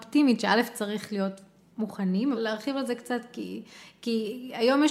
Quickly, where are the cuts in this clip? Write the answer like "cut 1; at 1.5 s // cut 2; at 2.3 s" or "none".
cut 1; at 2.3 s